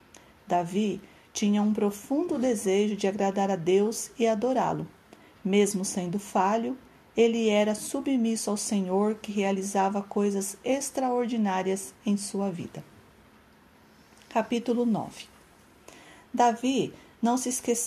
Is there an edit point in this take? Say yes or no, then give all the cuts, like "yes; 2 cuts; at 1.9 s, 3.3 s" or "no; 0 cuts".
no; 0 cuts